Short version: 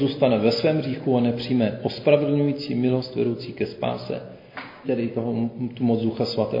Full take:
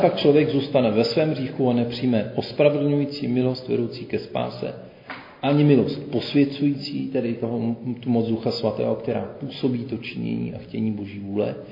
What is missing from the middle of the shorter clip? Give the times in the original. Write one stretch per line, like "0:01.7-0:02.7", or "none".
0:05.4-0:07.1